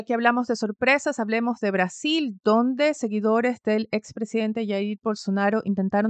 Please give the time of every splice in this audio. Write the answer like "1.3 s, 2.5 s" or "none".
none